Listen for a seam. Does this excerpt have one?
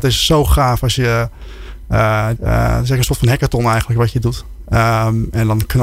yes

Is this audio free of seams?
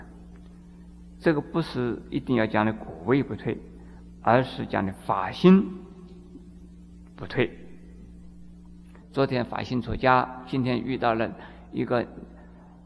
no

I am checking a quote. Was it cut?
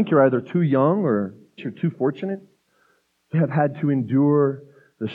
yes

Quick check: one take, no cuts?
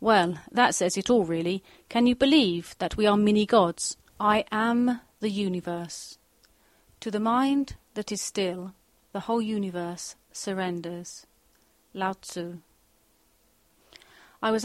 no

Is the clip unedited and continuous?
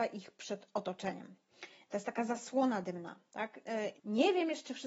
no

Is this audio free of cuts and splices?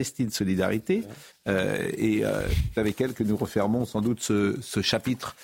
no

